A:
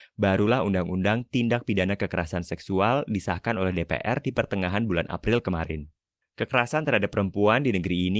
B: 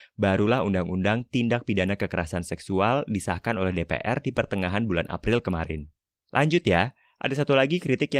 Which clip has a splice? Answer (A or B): A